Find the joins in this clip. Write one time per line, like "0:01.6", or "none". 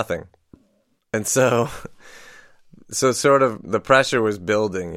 0:01.0